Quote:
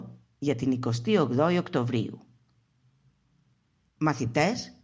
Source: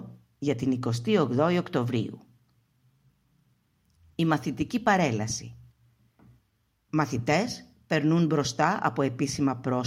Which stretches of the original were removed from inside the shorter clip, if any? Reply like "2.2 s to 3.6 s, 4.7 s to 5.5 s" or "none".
3.9 s to 6.8 s